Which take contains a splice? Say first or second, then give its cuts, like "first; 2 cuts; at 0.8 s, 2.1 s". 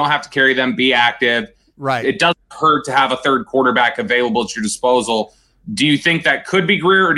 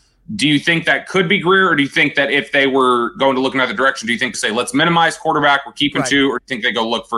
second; 1 cut; at 4.3 s